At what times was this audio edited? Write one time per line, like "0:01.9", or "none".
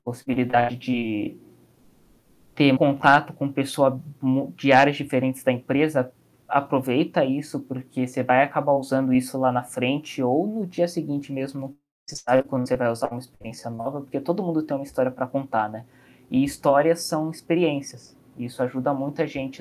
0:02.8